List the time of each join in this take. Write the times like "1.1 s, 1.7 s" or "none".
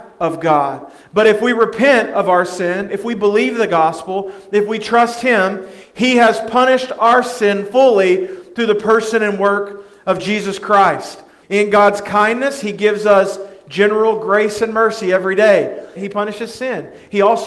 11.4 s, 16.0 s